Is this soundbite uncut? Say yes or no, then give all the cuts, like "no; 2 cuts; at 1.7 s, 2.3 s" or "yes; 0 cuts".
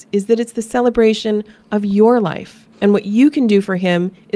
no; 1 cut; at 2.7 s